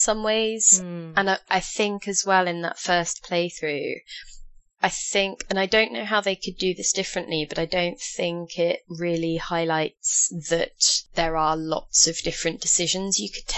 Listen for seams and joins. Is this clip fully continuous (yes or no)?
yes